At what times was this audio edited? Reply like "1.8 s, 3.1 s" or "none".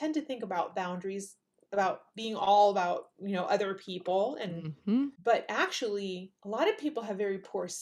5.1 s, 6.4 s